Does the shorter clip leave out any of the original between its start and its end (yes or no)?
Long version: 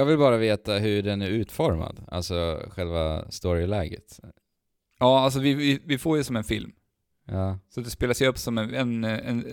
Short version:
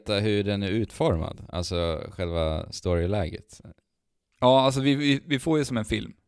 no